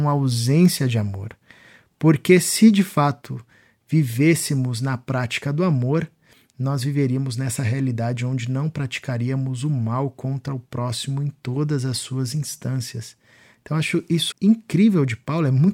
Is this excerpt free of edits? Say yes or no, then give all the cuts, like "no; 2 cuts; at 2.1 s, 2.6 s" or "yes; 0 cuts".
no; 1 cut; at 14.3 s